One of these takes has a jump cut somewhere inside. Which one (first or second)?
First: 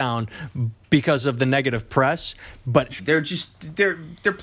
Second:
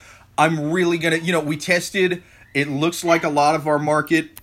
first